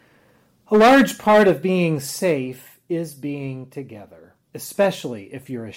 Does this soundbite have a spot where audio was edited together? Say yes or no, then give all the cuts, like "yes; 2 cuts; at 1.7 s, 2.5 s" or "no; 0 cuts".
yes; 1 cut; at 4.4 s